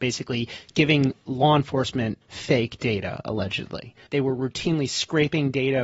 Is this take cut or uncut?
cut